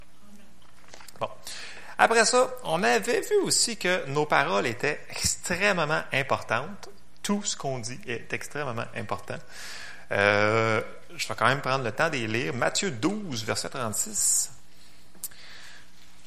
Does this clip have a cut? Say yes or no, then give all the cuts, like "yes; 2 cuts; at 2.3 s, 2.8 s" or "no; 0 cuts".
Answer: no; 0 cuts